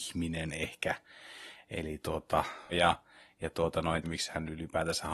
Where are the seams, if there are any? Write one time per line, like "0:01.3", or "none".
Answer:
0:02.7
0:04.0